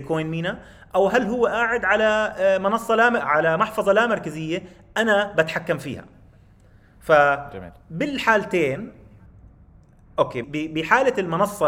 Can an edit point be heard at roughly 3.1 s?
no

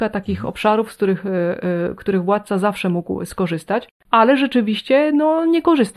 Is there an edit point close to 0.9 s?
no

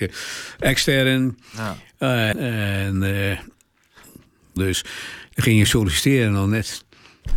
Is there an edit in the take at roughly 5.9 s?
no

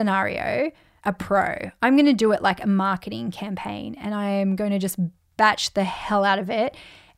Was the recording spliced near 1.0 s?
yes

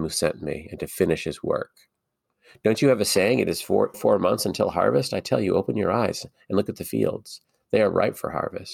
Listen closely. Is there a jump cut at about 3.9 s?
yes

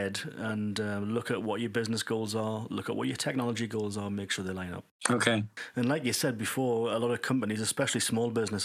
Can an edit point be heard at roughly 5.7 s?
no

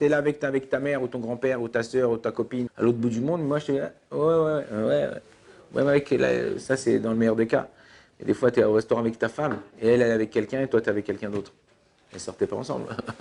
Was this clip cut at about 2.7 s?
yes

